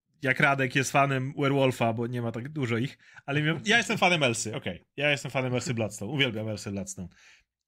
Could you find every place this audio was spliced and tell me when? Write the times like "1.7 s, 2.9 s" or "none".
4.5 s